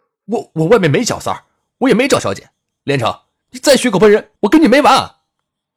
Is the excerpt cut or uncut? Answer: cut